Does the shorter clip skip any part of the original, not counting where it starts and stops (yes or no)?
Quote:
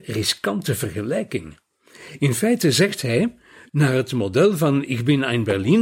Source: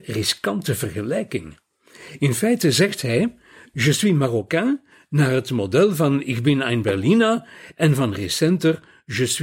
yes